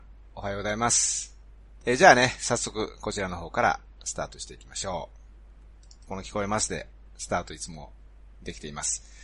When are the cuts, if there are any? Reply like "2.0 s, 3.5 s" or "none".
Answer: 1.8 s, 6.1 s